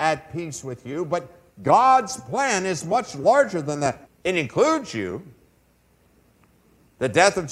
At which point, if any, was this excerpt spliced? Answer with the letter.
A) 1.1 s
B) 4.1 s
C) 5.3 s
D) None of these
B